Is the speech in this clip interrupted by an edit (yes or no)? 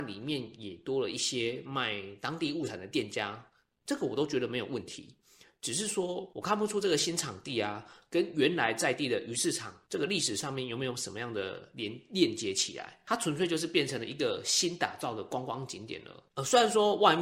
no